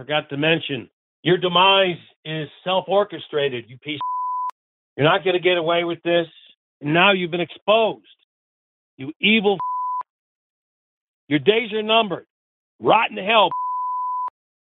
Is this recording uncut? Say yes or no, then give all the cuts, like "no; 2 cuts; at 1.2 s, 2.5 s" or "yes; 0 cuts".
yes; 0 cuts